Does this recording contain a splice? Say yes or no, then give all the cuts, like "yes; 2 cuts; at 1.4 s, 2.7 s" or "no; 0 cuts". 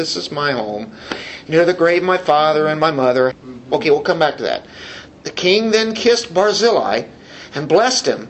yes; 2 cuts; at 3.3 s, 5.1 s